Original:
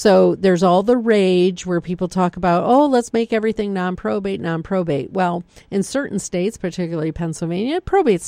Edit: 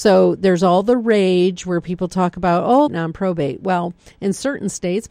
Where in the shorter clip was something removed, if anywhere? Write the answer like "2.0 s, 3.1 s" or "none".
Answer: 2.9 s